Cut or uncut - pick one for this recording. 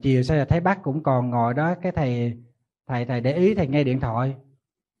uncut